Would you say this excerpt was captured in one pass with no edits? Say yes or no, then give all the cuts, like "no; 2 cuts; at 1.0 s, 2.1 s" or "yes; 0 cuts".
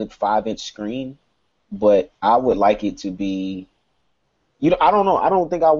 yes; 0 cuts